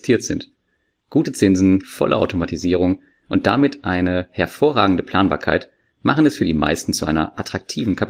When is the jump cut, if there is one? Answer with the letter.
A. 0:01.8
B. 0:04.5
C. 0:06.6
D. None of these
A